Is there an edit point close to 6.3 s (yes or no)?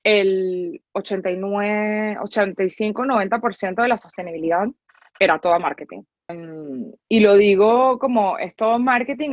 yes